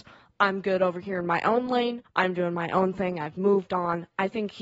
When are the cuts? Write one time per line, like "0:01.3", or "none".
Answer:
0:02.0